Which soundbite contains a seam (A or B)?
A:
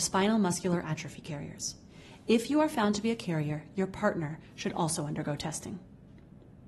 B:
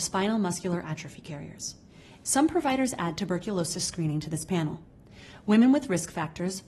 B